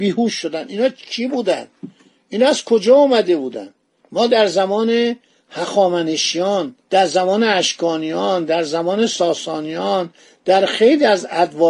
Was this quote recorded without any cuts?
no; 2 cuts; at 4.0 s, 6.8 s

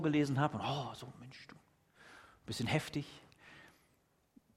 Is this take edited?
no; 0 cuts

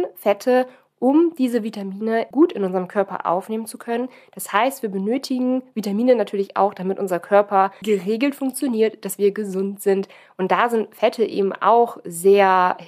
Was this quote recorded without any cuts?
no; 2 cuts; at 2.3 s, 7.8 s

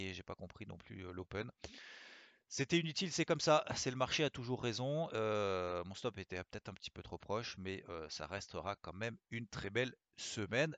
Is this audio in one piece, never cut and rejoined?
yes; 0 cuts

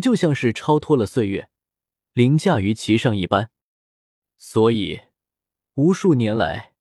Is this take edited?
no; 0 cuts

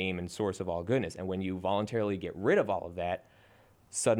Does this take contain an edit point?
no; 0 cuts

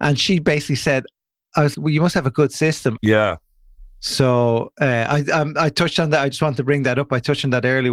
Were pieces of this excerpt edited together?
yes; 2 cuts; at 1.7 s, 3.0 s

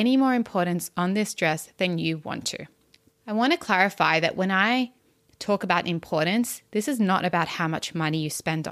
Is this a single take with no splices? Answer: no; 1 cut; at 3.1 s

